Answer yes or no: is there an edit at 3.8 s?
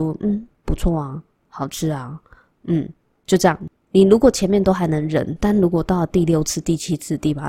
no